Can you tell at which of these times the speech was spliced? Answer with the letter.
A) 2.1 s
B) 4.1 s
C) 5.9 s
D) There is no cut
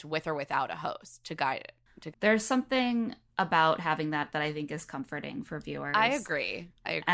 A